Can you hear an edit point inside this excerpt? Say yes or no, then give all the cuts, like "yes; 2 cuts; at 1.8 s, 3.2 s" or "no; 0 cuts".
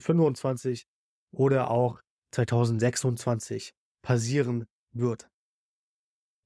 no; 0 cuts